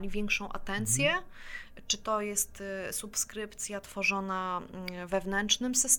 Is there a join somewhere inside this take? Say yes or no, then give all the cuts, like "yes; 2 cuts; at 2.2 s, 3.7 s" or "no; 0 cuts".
no; 0 cuts